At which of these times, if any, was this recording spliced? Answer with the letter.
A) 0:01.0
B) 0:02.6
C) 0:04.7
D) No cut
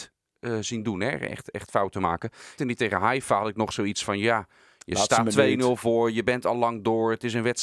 B